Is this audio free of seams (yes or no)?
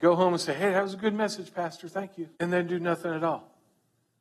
no